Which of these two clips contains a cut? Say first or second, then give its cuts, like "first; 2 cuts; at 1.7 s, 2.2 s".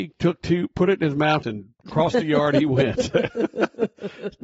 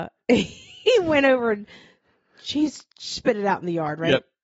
first; 1 cut; at 1.4 s